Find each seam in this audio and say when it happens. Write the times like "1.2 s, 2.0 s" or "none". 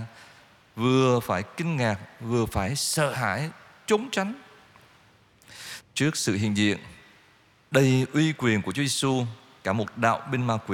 5.8 s